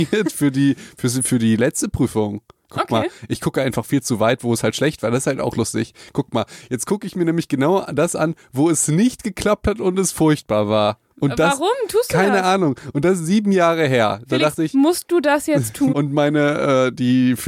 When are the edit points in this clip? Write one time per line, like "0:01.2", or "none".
0:15.9